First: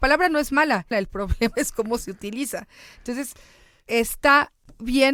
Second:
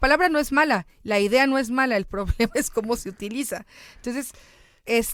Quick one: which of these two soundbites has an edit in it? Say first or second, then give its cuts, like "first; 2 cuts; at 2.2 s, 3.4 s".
first; 1 cut; at 0.9 s